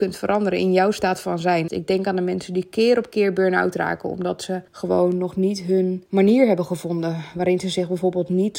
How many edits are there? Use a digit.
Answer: 3